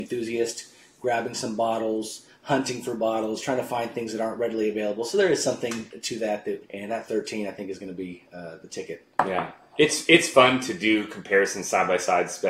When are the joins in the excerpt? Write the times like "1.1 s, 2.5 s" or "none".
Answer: 6.6 s